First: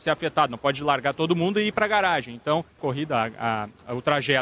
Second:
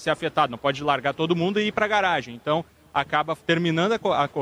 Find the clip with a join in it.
first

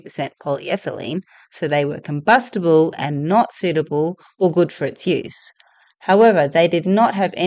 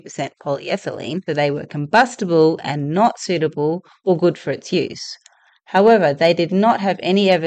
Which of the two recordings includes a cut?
second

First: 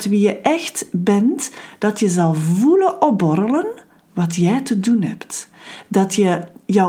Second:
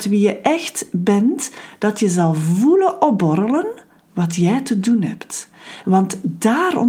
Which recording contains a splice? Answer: second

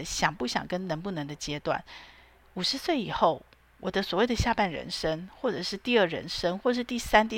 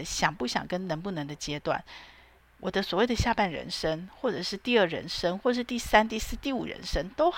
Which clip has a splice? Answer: second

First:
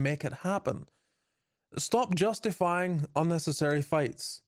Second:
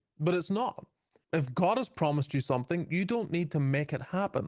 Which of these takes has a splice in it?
second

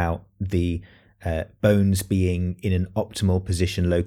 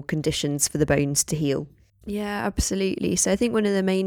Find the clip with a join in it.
second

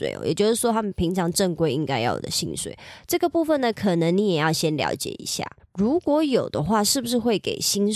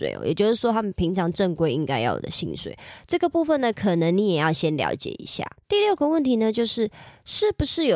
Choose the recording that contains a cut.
first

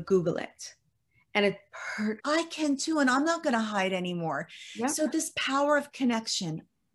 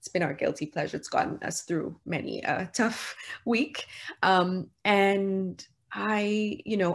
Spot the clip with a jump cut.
first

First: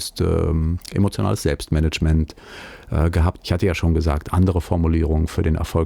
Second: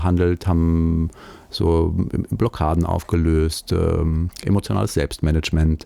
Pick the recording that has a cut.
first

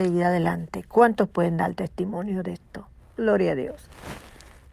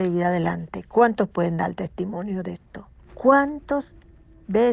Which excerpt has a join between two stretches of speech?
second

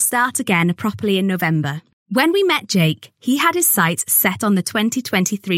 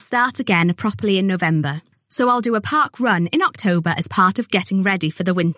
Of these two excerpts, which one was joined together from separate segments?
first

